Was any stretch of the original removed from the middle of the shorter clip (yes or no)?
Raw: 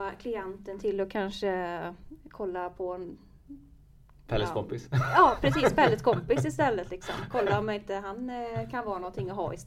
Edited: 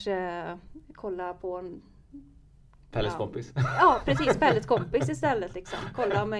no